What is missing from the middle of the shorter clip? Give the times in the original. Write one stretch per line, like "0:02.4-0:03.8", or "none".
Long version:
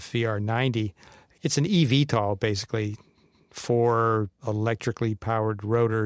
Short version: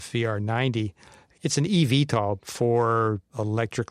0:02.4-0:03.5